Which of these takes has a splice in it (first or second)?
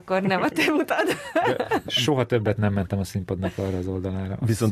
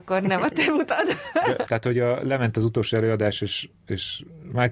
second